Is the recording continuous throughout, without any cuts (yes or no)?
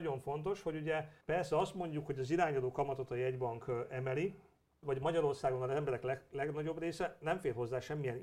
no